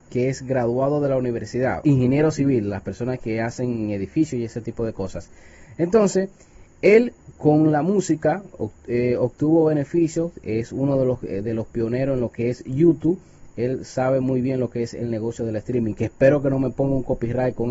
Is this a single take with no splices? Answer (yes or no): no